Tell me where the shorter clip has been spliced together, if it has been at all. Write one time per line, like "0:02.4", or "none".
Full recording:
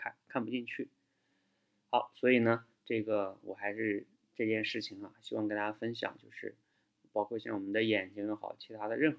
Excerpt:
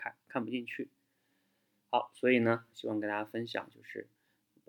0:02.7